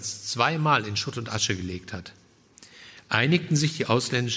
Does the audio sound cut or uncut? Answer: uncut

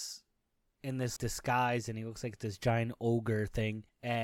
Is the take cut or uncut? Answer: cut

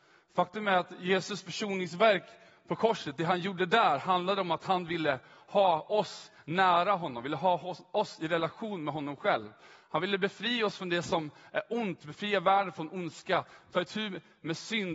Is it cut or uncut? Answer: uncut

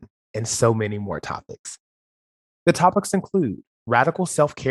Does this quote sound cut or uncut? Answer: cut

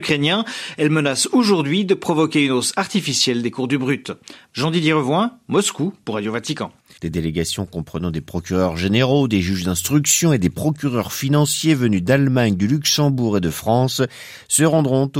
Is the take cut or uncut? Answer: cut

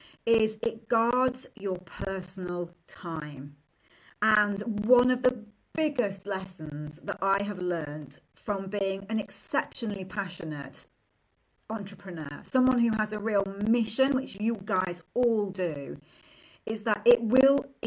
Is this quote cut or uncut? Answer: uncut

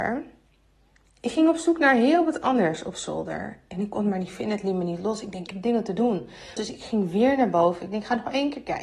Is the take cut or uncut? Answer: cut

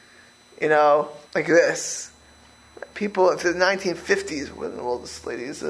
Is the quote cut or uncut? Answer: cut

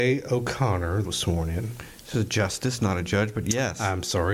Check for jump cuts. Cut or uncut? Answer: cut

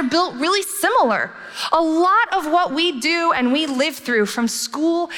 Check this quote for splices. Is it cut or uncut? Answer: uncut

